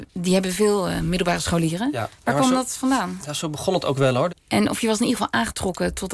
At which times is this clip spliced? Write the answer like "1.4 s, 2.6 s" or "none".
4.3 s